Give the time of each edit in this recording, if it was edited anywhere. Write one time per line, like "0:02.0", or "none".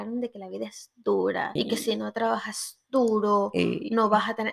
0:01.6